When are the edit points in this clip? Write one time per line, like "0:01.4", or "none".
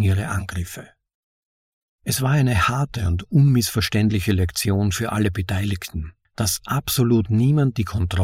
0:06.2